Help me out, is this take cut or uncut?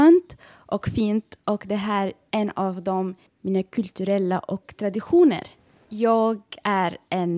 cut